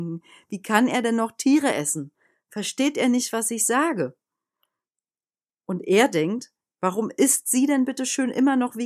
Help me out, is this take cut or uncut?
uncut